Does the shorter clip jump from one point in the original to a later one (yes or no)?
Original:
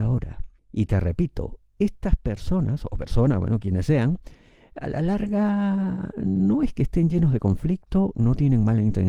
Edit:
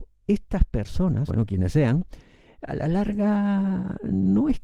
yes